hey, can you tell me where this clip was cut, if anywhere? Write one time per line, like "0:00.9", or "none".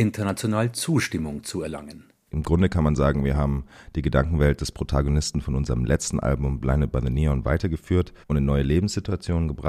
0:02.3
0:08.2